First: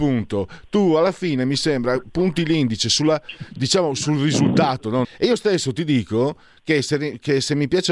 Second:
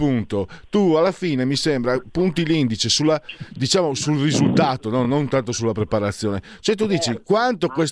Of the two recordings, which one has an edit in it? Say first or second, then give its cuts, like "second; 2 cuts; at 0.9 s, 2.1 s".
first; 1 cut; at 5.0 s